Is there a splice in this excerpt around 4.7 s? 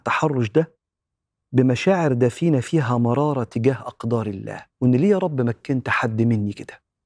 yes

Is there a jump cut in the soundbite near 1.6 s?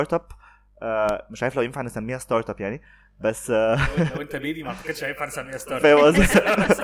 no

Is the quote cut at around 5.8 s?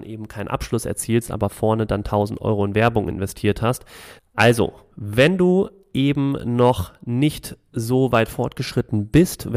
no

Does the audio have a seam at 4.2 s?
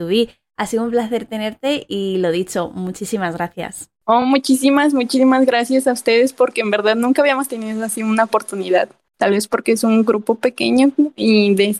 no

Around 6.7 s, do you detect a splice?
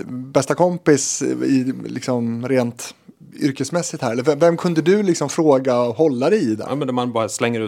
yes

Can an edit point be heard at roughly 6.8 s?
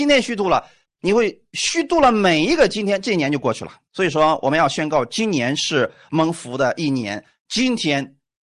no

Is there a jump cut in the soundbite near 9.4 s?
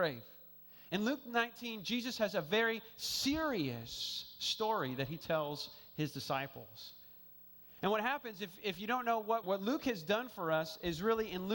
yes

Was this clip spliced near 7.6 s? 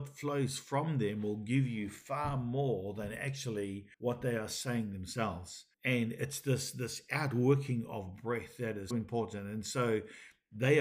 no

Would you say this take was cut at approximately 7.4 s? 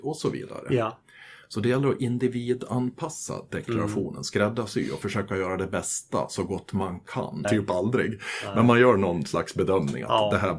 yes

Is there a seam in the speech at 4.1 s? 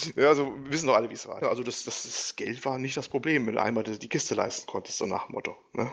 no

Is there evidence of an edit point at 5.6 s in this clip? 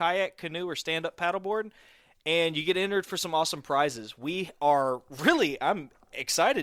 yes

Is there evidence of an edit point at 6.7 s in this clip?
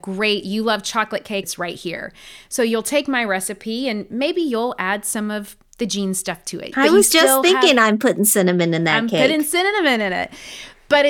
yes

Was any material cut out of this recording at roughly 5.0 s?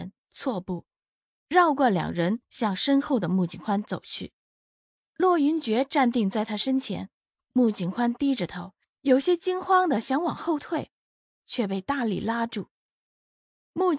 yes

